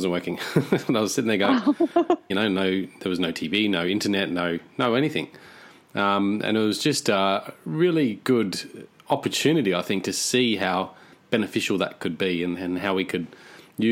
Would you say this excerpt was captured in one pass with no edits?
no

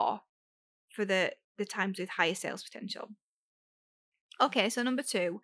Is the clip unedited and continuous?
yes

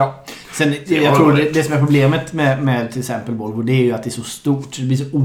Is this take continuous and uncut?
yes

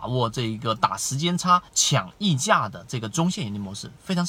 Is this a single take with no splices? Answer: no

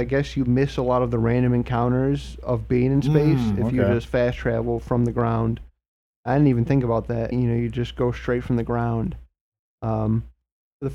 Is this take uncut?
no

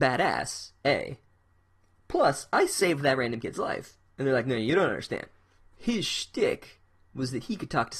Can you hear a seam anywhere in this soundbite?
yes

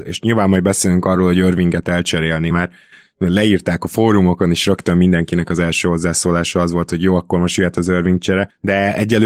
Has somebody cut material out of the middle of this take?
yes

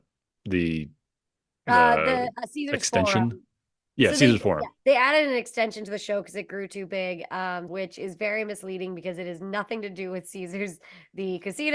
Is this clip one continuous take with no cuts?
no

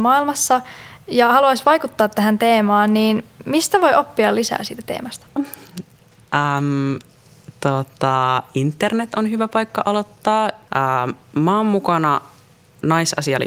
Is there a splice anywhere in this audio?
yes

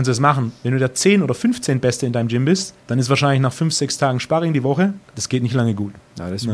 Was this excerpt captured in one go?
no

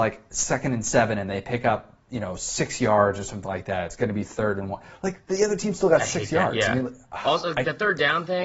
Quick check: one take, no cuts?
yes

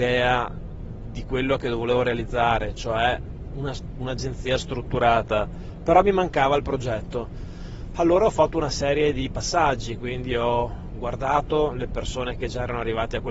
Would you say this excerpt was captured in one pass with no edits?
yes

